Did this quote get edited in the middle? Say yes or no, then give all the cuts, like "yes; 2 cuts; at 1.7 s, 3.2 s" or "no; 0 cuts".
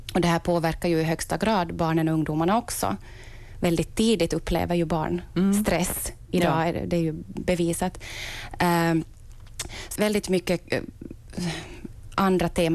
yes; 1 cut; at 10.0 s